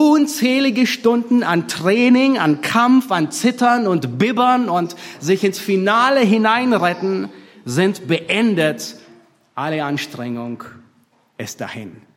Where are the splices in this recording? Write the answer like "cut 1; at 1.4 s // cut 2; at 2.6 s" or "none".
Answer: none